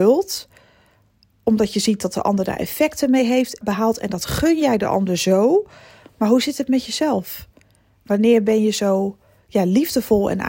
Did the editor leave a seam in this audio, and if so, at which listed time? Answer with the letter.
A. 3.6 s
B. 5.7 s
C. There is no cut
A